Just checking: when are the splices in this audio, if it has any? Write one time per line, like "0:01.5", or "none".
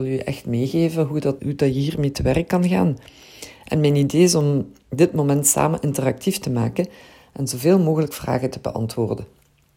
0:01.4